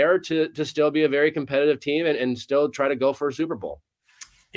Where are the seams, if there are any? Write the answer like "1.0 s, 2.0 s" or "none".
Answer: none